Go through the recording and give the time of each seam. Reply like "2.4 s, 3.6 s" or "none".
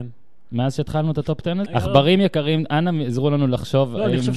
1.7 s